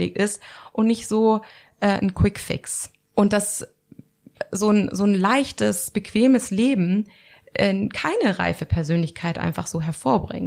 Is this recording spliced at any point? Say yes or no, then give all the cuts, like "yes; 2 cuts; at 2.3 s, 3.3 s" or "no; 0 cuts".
no; 0 cuts